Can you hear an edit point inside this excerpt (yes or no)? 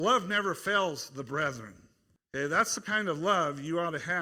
no